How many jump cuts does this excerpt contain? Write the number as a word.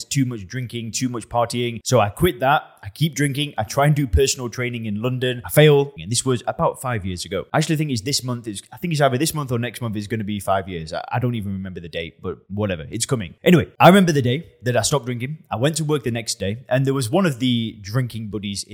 one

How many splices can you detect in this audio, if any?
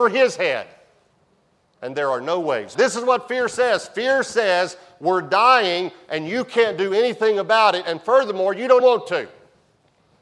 two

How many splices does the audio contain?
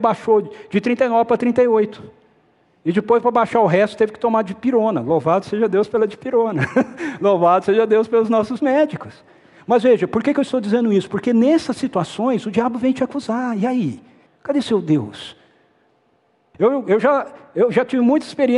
two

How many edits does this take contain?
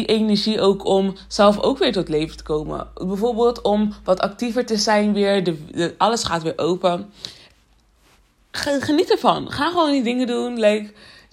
zero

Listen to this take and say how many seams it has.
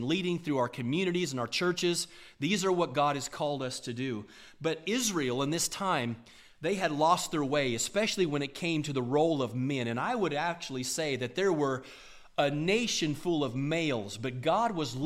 zero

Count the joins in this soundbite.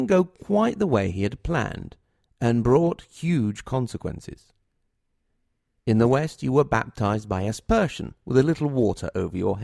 one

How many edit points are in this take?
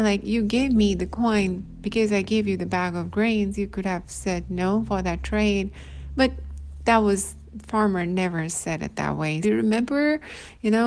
one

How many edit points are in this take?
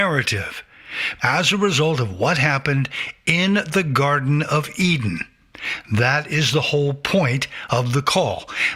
one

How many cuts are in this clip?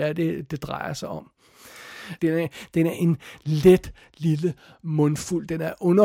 one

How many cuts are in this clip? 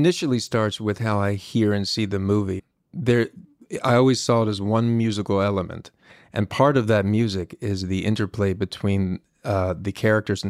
zero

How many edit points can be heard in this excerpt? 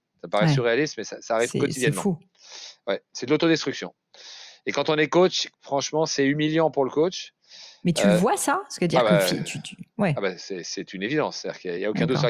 one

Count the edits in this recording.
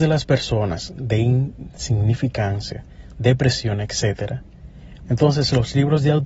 two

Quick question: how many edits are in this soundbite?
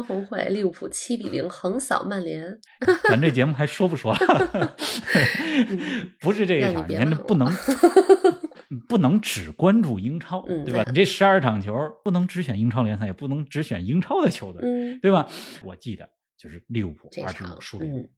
three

